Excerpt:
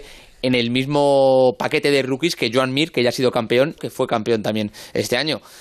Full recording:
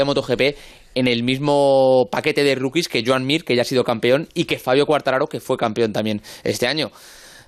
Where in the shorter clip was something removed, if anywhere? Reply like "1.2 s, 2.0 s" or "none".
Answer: 3.8 s